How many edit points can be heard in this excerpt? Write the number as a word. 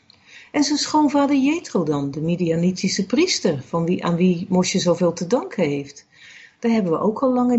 zero